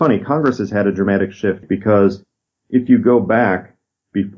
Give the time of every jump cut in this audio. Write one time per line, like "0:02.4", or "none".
0:01.6